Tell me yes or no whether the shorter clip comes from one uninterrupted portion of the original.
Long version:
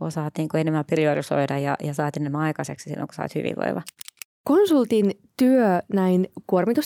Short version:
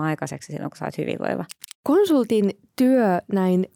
no